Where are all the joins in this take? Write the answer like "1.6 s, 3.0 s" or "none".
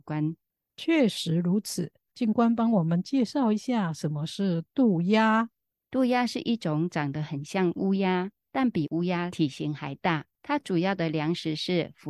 2.1 s